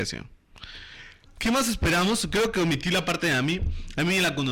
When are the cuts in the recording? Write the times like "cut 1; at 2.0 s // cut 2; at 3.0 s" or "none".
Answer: cut 1; at 1.3 s